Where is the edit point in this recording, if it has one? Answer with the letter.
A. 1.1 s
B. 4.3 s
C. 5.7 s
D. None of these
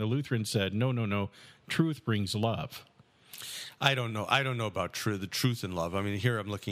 D